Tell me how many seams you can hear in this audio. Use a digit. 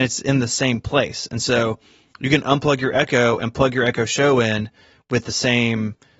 0